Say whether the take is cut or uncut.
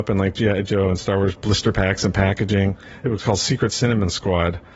uncut